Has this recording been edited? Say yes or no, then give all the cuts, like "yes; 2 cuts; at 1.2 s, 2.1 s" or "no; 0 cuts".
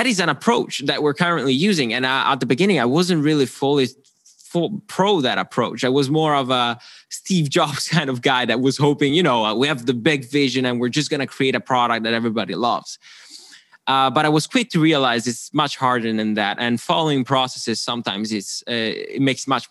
no; 0 cuts